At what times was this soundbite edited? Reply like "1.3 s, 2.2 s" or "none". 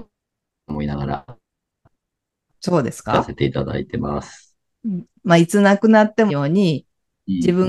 5.1 s, 6.3 s